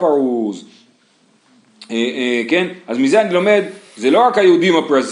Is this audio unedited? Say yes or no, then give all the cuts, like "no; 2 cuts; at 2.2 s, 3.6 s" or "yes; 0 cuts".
yes; 0 cuts